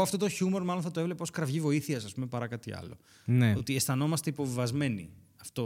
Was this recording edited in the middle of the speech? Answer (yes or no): no